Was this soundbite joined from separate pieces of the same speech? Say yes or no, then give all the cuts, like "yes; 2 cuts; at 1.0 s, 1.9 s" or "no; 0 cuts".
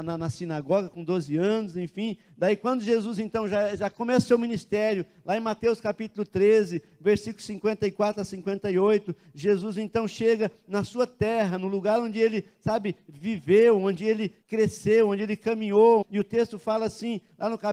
yes; 2 cuts; at 14.4 s, 16.0 s